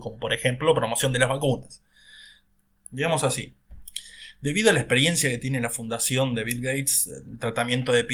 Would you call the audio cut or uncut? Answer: cut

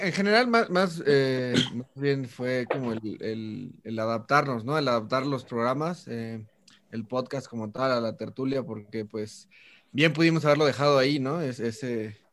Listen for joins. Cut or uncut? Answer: uncut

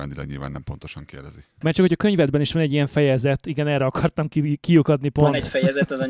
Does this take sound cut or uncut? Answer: cut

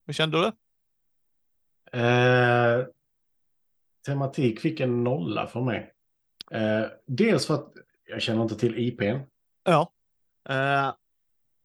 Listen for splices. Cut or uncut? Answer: cut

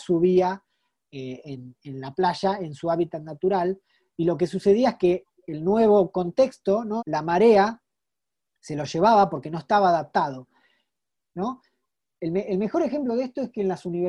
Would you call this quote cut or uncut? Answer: cut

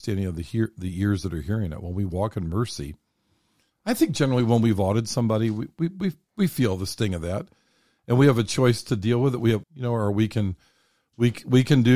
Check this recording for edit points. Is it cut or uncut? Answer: cut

